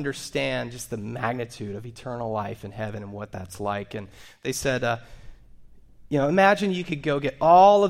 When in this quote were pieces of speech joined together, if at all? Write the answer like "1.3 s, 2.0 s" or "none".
none